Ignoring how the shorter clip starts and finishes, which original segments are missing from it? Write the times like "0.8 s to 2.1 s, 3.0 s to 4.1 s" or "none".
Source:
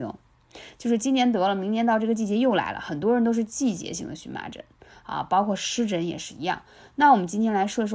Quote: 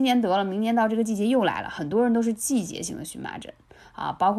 none